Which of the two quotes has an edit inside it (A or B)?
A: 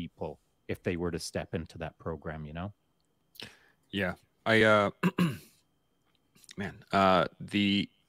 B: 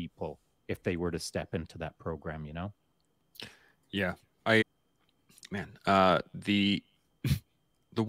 B